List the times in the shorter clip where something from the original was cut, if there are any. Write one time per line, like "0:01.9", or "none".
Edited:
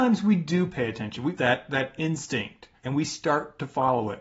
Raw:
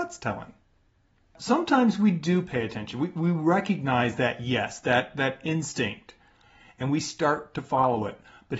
0:01.3
0:02.8